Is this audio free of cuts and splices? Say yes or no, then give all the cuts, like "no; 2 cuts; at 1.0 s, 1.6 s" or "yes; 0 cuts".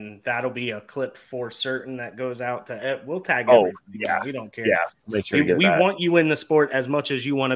yes; 0 cuts